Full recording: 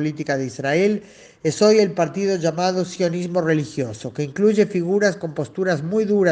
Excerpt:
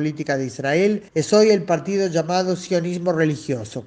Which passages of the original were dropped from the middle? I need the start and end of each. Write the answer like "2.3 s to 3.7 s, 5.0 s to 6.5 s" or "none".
1.1 s to 1.4 s